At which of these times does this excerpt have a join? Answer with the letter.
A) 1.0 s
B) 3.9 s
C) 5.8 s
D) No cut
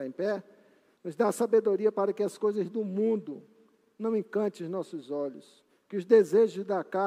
A